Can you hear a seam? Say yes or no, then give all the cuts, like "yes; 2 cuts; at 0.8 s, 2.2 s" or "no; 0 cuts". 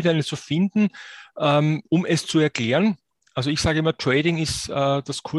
no; 0 cuts